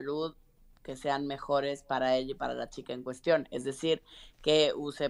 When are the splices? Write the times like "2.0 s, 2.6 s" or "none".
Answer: none